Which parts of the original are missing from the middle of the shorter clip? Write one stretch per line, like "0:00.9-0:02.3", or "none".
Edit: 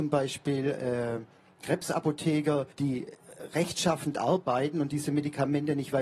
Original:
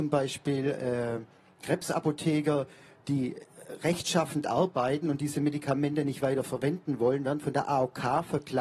0:02.7-0:03.0